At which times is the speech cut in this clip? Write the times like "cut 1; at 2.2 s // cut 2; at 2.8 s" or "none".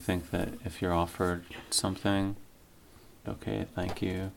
cut 1; at 3.2 s